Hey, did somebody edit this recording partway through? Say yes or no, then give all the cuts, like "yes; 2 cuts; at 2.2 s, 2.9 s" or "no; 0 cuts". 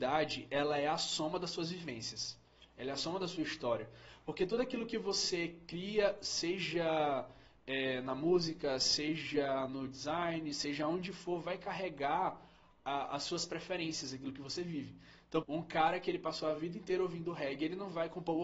yes; 1 cut; at 15.4 s